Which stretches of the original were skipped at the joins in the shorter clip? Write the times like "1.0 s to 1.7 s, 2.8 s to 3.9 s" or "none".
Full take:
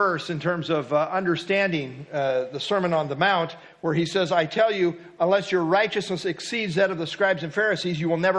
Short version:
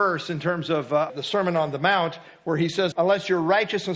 1.1 s to 2.5 s, 4.3 s to 5.1 s